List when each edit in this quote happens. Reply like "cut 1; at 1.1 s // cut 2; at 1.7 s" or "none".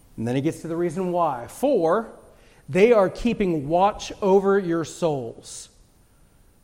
none